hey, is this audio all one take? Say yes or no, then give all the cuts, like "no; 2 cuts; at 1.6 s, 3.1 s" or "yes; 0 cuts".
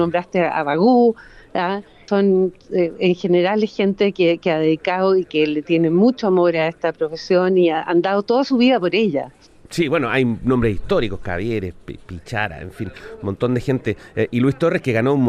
yes; 0 cuts